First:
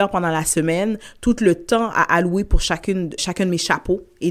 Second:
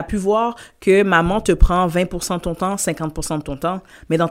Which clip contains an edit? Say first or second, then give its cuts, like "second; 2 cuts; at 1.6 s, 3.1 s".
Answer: first; 1 cut; at 3.2 s